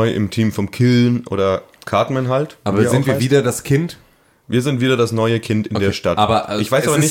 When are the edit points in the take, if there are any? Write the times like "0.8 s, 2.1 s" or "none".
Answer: none